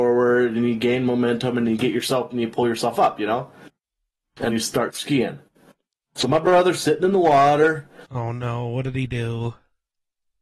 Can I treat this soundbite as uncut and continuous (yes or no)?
no